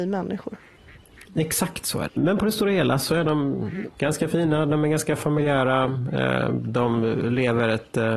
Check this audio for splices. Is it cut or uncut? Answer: cut